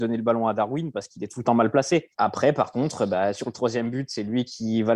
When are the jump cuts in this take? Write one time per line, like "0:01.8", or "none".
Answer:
0:02.1